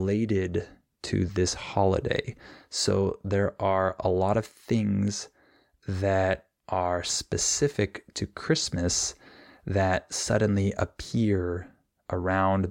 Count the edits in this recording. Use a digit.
0